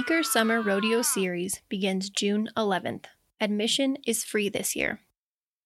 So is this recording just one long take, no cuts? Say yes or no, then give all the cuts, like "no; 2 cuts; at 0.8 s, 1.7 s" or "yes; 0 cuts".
yes; 0 cuts